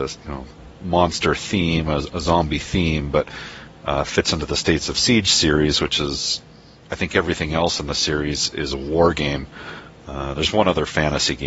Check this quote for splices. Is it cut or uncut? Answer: uncut